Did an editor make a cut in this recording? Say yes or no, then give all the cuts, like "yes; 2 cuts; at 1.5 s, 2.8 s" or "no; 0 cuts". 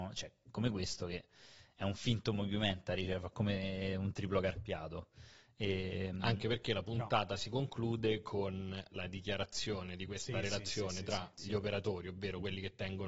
no; 0 cuts